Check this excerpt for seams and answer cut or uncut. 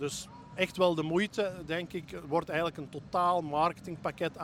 uncut